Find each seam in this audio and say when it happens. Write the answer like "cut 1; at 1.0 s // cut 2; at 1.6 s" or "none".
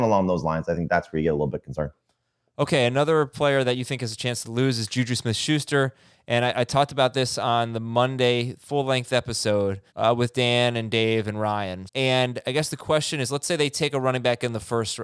cut 1; at 9.9 s // cut 2; at 11.9 s